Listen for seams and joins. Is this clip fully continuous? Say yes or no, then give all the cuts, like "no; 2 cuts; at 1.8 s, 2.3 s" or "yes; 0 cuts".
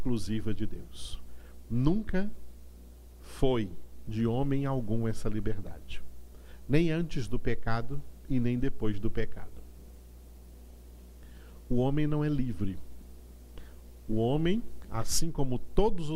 yes; 0 cuts